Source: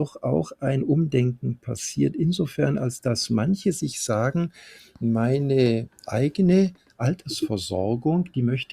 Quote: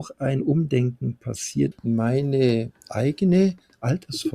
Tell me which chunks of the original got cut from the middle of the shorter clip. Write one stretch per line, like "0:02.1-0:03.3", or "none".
0:02.1-0:04.9